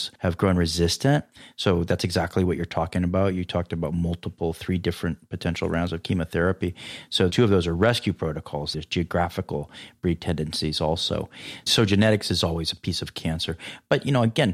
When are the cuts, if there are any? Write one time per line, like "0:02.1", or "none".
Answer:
0:08.7